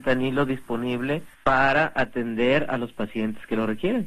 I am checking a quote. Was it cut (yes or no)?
yes